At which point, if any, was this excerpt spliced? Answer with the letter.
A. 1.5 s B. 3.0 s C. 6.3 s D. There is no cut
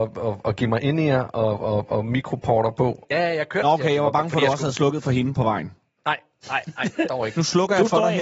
B